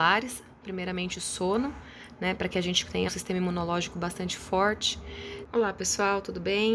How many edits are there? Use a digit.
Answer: 2